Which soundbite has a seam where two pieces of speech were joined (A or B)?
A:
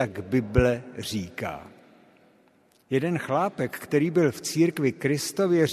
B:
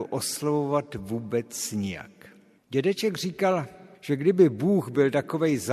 B